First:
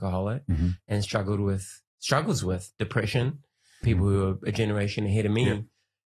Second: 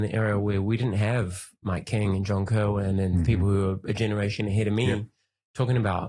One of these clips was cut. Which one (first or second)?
first